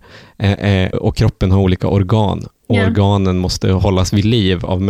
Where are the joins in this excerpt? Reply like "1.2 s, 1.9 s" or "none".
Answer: 0.9 s